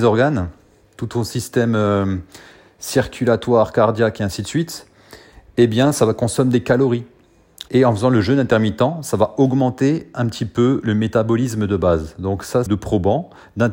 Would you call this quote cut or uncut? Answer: cut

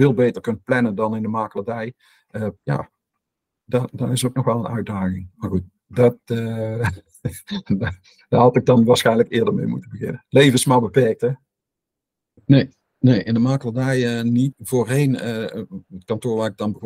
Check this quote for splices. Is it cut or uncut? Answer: cut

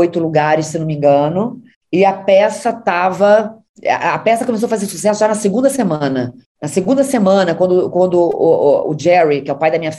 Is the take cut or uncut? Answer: uncut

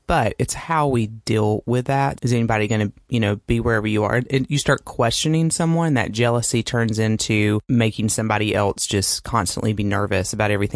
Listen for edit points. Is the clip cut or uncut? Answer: cut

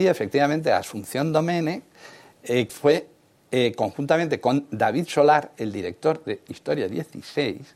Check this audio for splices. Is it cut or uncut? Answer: cut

